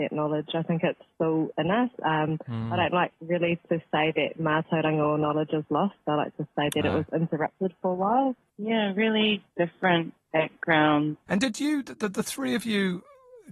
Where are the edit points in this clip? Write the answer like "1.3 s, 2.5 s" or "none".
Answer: 8.5 s, 11.3 s